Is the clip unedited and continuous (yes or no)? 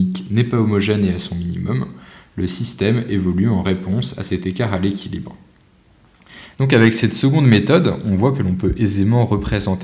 no